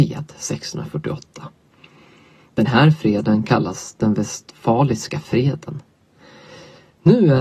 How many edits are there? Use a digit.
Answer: 0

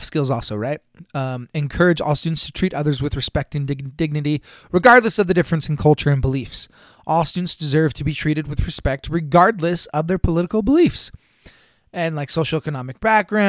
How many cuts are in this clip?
0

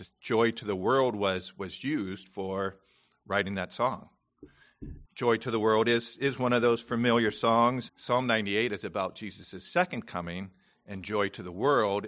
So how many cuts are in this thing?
2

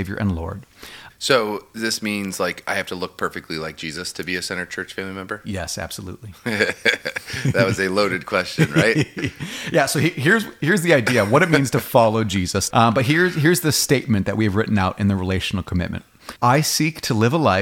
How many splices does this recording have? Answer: 3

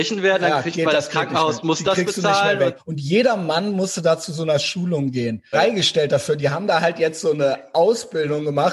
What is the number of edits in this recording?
2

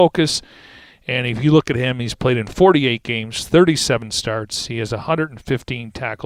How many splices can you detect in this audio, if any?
0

